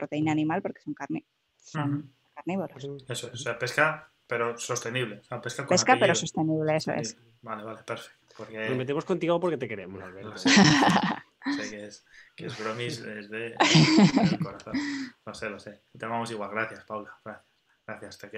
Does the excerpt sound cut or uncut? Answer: cut